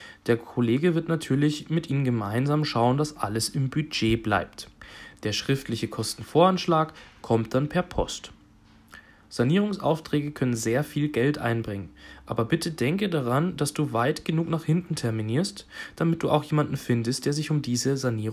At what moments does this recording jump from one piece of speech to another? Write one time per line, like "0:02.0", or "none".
none

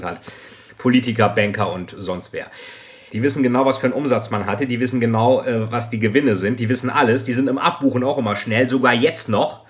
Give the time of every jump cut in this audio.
0:03.1

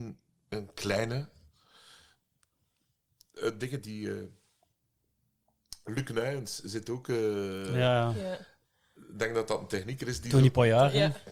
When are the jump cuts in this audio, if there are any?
none

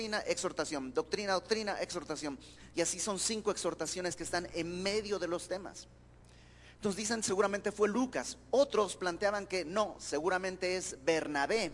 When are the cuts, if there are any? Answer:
none

